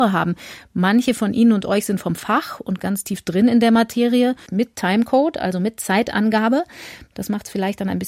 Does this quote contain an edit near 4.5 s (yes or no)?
yes